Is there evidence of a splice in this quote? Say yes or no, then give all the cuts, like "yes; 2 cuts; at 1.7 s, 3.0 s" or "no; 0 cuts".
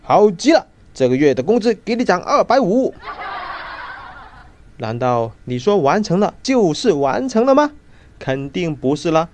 no; 0 cuts